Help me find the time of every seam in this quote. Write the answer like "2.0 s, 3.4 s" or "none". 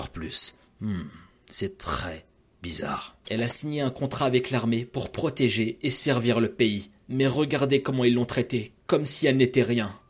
3.2 s